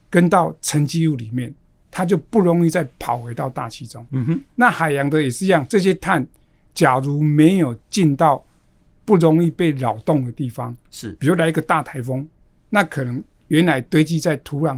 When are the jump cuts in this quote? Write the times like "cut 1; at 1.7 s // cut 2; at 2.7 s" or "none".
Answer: cut 1; at 4.1 s